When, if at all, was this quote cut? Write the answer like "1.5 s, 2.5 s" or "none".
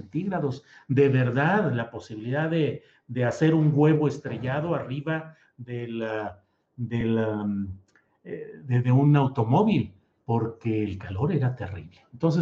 none